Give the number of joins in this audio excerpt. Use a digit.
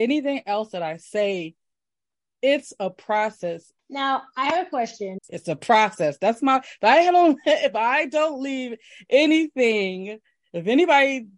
2